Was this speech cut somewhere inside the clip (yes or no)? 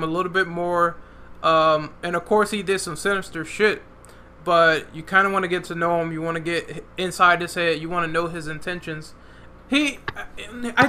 yes